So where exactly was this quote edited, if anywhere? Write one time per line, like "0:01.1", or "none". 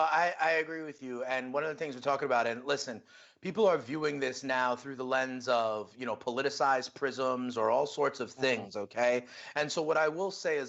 none

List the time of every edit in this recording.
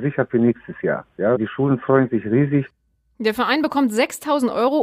0:01.4

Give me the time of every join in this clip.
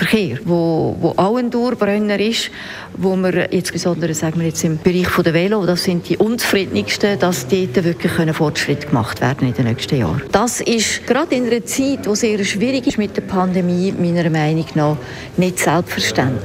0:10.3

